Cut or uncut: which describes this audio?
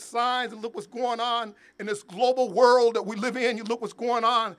uncut